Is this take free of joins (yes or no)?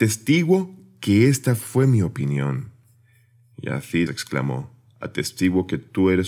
no